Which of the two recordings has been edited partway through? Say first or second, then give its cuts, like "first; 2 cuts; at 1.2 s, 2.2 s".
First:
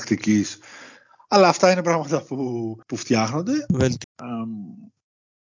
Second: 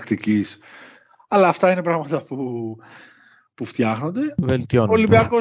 first; 2 cuts; at 2.8 s, 4.0 s